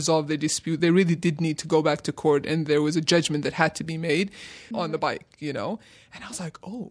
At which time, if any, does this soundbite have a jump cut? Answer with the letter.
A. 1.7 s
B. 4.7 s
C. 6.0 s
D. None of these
B